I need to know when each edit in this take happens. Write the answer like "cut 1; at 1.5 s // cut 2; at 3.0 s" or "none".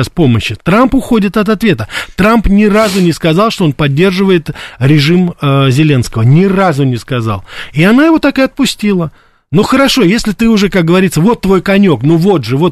none